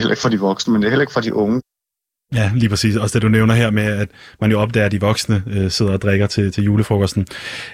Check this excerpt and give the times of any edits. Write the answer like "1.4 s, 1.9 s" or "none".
none